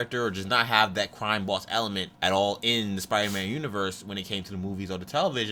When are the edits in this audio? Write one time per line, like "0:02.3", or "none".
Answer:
0:02.1